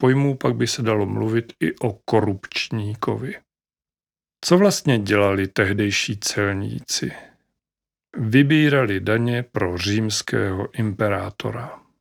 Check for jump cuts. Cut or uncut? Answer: uncut